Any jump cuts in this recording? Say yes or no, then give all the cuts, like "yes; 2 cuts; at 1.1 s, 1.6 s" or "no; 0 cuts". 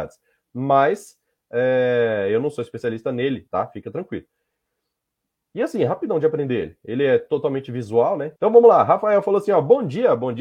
yes; 2 cuts; at 3.5 s, 8.4 s